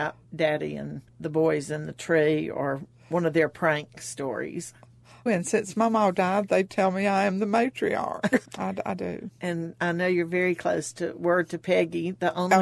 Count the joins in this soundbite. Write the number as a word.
two